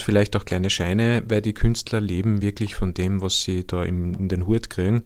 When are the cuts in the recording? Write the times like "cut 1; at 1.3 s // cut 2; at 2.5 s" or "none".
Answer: none